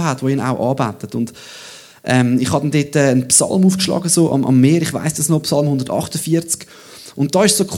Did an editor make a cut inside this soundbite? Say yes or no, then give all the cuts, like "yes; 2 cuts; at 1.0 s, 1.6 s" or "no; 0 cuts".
no; 0 cuts